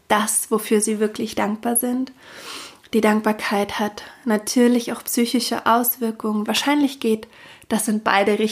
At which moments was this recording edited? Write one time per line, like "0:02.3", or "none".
0:06.4